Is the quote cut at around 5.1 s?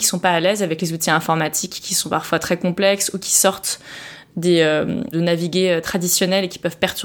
yes; 1 cut; at 5.1 s

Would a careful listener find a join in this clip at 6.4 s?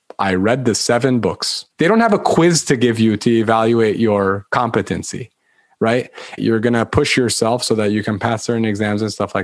yes; 2 cuts; at 1.7 s, 6.4 s

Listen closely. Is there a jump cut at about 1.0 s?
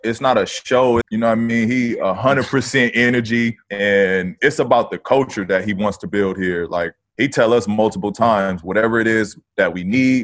yes; 1 cut; at 1.0 s

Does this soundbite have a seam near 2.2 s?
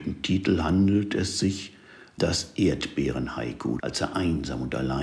yes; 2 cuts; at 2.2 s, 3.8 s

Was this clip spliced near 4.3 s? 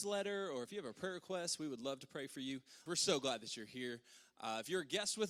no; 1 cut; at 2.9 s

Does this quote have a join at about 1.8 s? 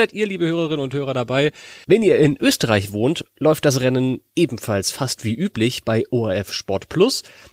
yes; 1 cut; at 1.8 s

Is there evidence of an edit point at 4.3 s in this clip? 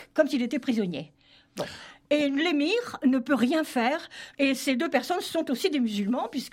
yes; 1 cut; at 4.3 s

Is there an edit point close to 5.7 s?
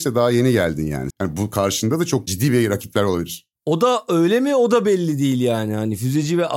no; 1 cut; at 1.1 s

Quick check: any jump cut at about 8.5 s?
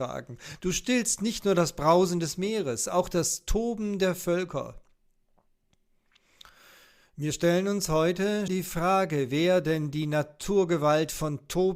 yes; 1 cut; at 8.5 s

